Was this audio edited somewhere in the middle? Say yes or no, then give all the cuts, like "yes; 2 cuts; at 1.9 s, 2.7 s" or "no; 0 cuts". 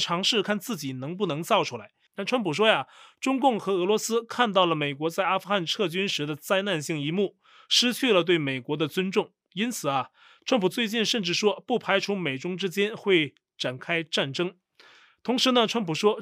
yes; 1 cut; at 2.1 s